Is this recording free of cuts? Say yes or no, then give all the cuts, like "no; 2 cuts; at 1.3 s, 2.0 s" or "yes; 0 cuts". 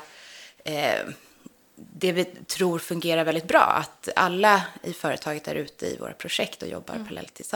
yes; 0 cuts